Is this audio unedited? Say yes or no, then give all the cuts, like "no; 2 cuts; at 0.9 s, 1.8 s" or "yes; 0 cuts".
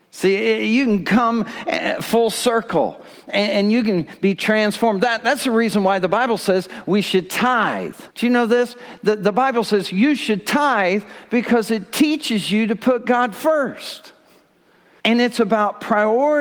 no; 2 cuts; at 8.1 s, 15.0 s